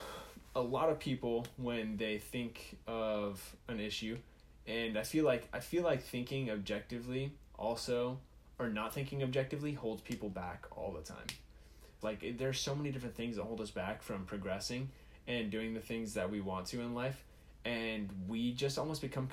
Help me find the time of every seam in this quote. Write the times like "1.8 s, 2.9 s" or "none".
12.0 s